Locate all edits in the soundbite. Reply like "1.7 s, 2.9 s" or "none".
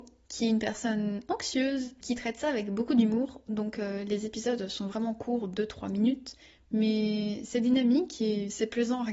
none